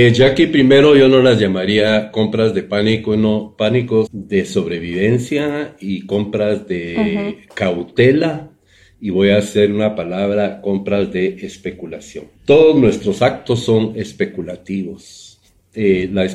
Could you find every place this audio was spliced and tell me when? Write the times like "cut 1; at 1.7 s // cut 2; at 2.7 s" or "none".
cut 1; at 4.1 s // cut 2; at 12.3 s